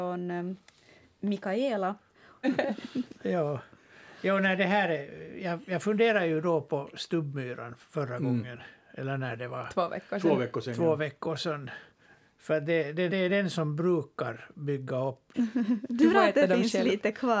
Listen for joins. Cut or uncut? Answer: cut